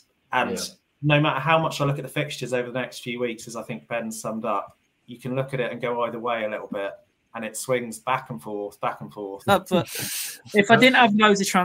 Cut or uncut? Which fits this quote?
cut